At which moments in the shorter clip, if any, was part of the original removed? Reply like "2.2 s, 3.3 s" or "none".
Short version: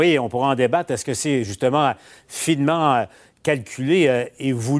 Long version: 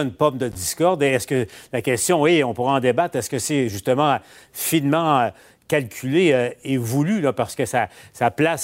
none